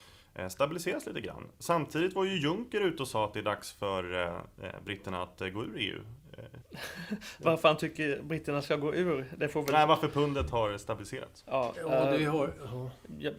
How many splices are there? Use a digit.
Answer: 1